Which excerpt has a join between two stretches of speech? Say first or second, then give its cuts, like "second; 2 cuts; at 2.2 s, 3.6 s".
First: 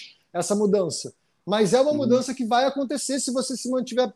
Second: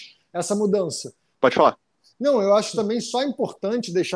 second; 1 cut; at 1.3 s